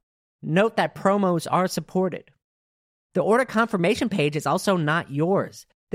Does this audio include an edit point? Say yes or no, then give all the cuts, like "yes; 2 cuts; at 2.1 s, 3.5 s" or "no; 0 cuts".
no; 0 cuts